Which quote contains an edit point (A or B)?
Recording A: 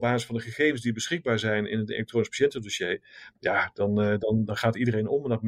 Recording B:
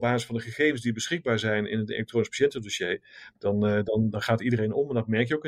B